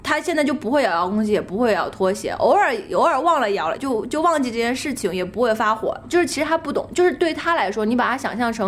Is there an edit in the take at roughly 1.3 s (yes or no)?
no